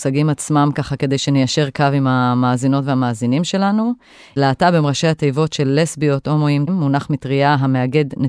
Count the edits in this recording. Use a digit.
2